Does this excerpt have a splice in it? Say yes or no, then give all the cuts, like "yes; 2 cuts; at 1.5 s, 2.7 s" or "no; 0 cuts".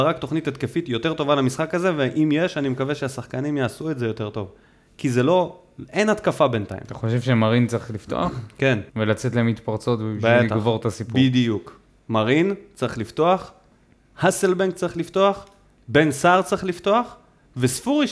yes; 1 cut; at 8.9 s